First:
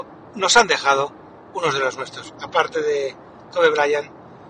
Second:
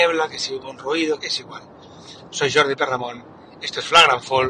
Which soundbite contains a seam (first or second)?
second